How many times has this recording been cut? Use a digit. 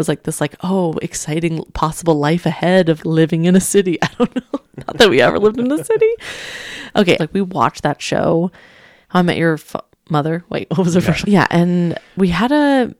3